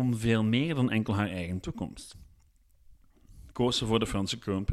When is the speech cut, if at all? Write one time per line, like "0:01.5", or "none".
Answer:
none